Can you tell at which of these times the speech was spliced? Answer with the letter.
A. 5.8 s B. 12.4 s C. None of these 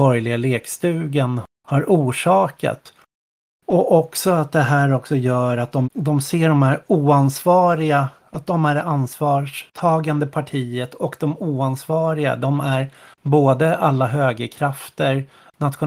A